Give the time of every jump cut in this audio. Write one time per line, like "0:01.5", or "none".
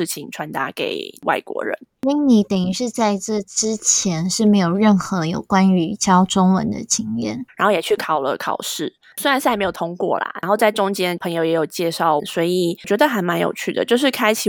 0:07.5
0:12.2